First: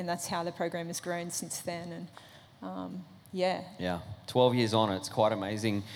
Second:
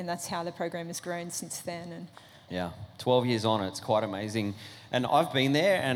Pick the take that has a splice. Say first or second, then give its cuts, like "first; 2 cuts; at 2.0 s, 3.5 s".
second; 1 cut; at 2.5 s